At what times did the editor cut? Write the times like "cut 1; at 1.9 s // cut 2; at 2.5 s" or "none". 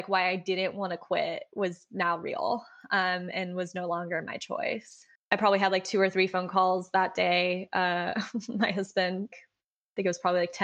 cut 1; at 5.2 s // cut 2; at 9.3 s